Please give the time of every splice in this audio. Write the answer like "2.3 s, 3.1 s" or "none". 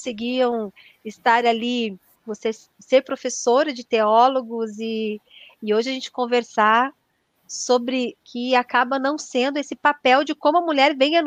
2.1 s, 8.2 s